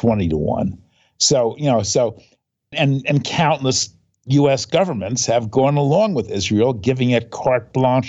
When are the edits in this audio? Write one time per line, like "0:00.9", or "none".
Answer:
0:02.7